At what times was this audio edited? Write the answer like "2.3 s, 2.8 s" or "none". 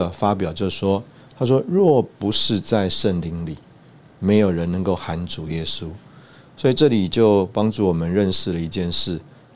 none